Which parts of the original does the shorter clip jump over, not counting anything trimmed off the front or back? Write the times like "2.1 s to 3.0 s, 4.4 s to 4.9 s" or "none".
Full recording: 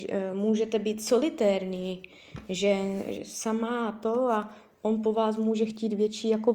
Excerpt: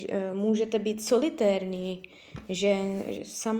none